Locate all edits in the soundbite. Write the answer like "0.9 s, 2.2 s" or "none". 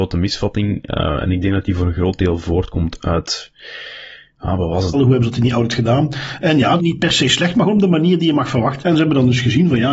4.9 s, 6.8 s, 8.8 s